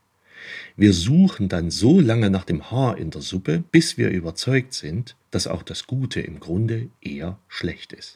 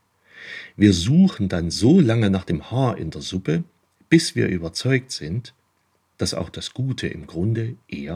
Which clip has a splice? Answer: first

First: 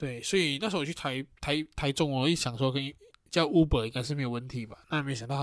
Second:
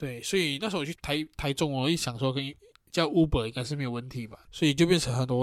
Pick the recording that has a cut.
second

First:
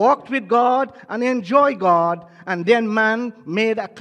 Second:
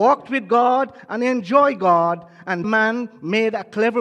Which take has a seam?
second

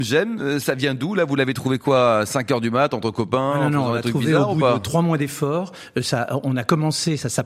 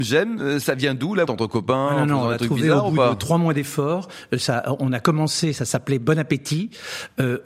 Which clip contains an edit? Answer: second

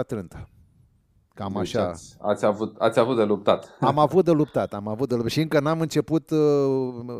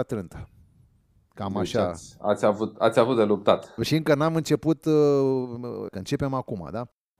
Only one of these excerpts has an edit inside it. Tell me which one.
second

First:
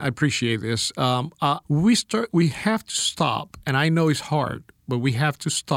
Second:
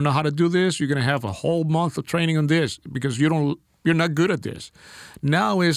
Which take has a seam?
first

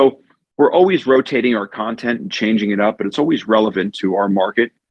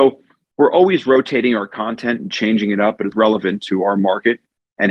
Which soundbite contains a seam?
second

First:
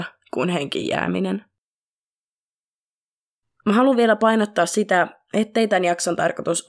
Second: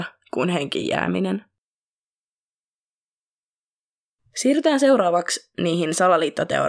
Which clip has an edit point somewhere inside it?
first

